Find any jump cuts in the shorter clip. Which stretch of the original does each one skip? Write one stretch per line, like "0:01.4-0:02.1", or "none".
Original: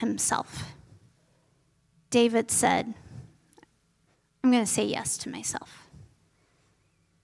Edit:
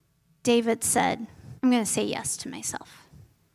0:03.2-0:04.4